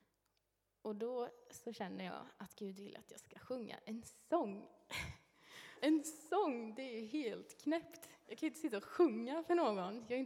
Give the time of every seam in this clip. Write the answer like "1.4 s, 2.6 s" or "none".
5.7 s